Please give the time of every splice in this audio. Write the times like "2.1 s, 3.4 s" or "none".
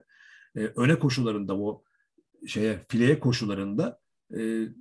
none